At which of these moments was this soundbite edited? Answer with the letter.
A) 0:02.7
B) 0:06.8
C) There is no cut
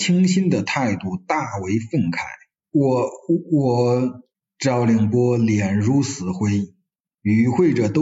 A